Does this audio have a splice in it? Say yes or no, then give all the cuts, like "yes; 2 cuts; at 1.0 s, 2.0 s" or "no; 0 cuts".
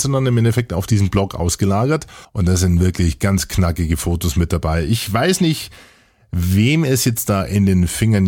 yes; 1 cut; at 2.2 s